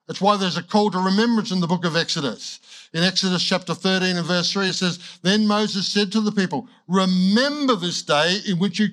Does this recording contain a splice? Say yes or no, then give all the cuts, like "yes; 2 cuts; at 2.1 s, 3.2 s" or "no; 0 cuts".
no; 0 cuts